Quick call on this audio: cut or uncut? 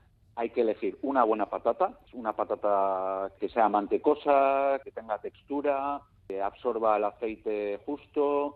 cut